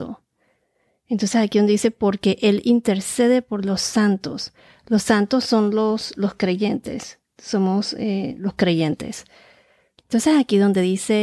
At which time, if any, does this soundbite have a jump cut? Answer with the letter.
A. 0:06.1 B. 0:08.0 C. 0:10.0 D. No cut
C